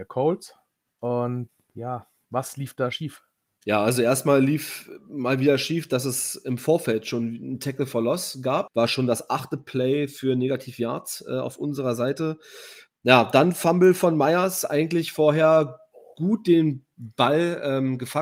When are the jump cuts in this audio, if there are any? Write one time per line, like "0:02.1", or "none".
0:08.7